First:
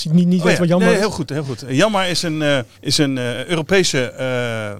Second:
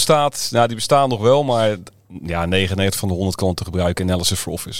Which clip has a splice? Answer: first; 1 cut; at 2.7 s

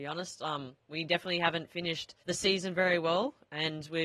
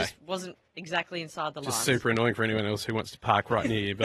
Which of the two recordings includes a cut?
first; 1 cut; at 2.2 s

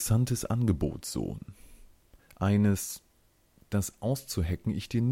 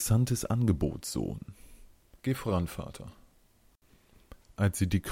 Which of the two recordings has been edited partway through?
second; 1 cut; at 2.2 s

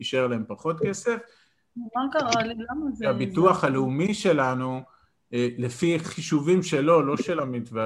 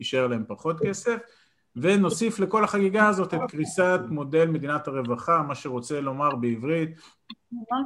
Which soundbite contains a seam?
first; 1 cut; at 1.7 s

